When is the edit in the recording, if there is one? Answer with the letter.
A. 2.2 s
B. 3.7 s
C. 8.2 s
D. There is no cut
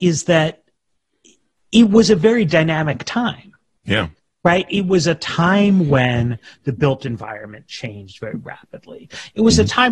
D